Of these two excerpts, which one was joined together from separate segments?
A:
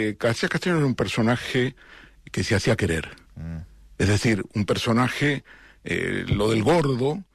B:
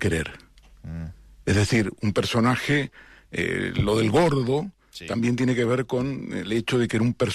A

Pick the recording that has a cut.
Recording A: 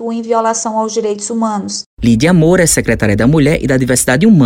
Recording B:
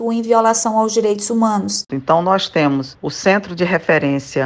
B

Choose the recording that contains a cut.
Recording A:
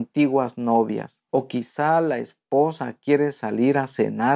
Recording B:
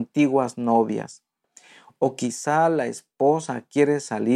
A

